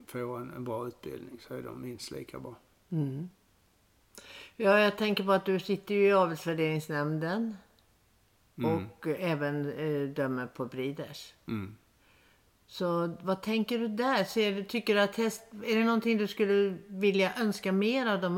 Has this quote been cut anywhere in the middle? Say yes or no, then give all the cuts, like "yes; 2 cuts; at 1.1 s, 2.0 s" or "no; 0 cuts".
no; 0 cuts